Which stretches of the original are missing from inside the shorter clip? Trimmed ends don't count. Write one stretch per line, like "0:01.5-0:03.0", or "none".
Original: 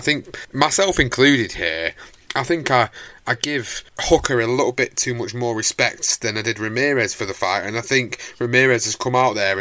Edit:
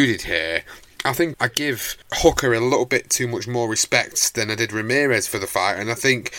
0:02.6-0:03.2